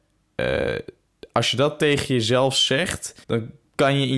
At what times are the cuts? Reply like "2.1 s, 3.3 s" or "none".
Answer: 3.2 s